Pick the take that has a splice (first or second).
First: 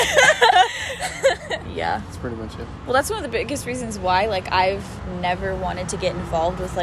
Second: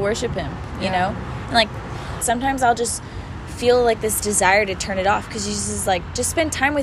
second